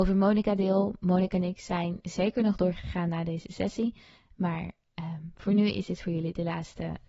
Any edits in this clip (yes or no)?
no